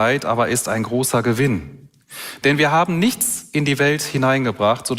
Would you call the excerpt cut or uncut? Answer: uncut